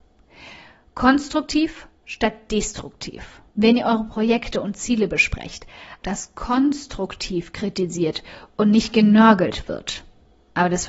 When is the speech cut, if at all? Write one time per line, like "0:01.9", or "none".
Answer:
0:03.5
0:06.0

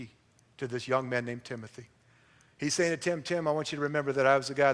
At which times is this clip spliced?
none

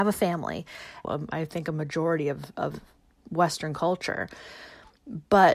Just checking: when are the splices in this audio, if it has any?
0:01.0

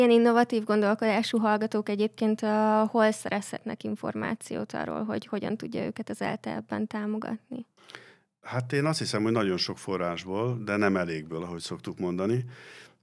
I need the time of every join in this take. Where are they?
none

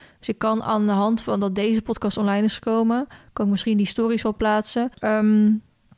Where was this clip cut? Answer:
0:04.9

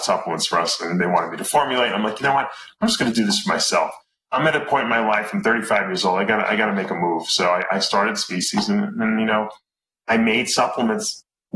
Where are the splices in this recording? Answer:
none

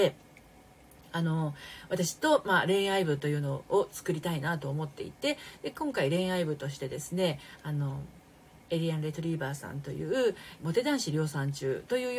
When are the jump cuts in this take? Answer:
0:02.2
0:10.6

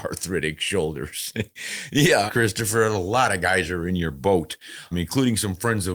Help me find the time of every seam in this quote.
0:02.3
0:04.9

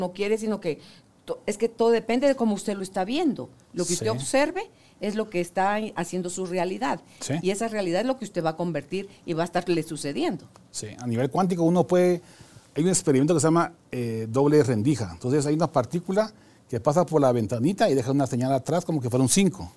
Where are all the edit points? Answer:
none

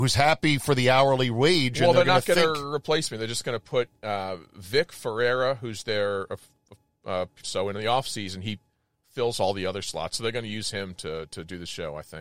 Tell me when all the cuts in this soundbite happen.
0:07.4

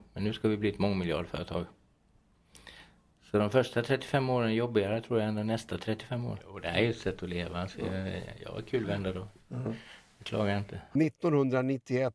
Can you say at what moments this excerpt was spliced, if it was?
0:11.0

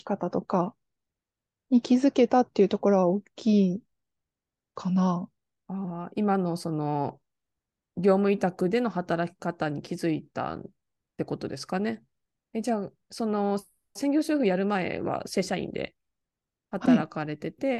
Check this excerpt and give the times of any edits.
0:12.4

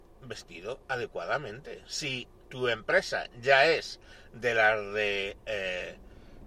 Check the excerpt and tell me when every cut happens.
none

